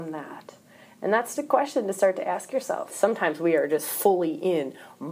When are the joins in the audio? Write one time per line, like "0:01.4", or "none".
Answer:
0:01.4
0:02.9